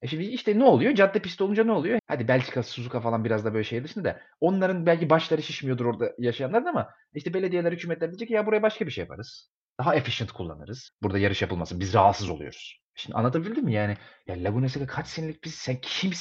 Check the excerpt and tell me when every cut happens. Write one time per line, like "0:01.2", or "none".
0:02.0
0:10.9
0:12.9